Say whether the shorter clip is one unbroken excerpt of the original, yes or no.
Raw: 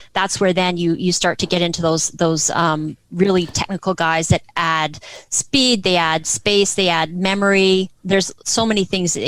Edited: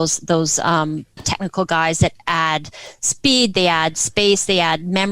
no